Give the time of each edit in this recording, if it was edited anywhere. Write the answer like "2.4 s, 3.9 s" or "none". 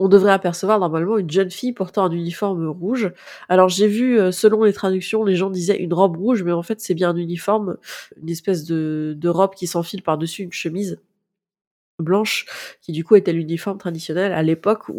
8.1 s